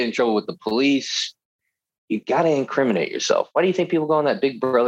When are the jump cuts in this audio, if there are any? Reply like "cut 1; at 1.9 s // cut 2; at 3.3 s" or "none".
cut 1; at 1.9 s